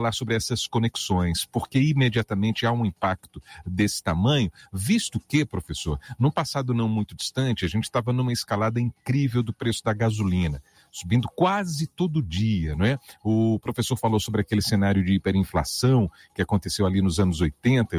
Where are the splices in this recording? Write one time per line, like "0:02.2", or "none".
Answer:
none